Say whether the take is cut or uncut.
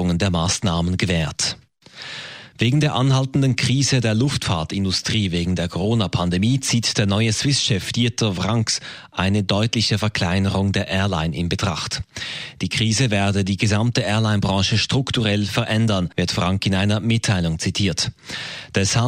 uncut